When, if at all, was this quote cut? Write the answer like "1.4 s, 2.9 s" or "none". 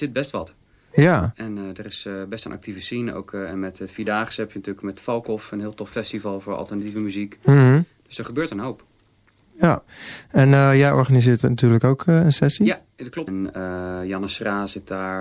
13.3 s